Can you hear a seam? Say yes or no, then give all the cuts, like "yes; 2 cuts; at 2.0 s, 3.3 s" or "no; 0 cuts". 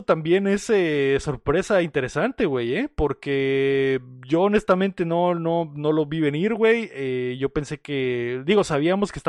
no; 0 cuts